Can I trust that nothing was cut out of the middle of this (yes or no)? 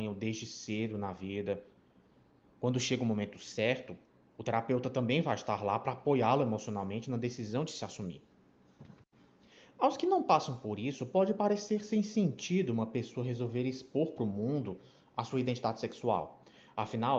yes